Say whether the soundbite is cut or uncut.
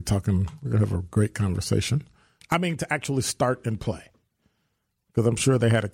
cut